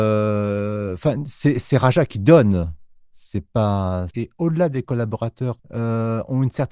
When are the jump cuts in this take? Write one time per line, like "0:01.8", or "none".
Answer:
0:04.1
0:05.6